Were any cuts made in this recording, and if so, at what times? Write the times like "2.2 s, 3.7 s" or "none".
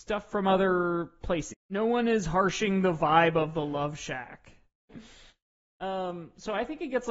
1.5 s, 4.9 s